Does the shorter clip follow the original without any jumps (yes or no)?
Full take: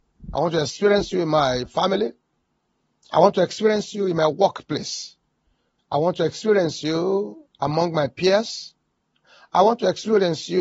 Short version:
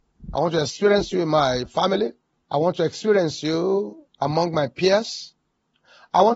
no